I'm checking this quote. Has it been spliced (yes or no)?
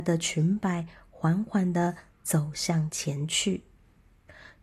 no